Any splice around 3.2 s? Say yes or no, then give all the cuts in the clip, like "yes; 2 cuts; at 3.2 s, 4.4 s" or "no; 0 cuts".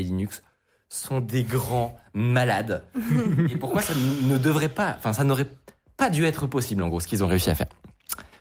no; 0 cuts